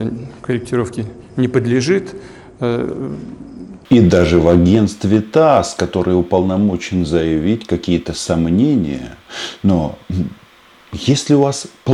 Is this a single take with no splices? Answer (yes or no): yes